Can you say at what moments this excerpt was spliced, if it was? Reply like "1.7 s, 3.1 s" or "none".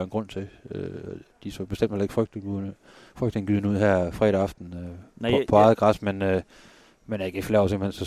none